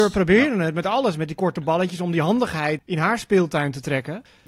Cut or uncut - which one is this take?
uncut